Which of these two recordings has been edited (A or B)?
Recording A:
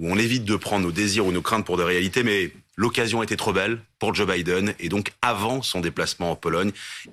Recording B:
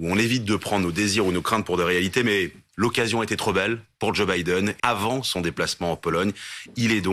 B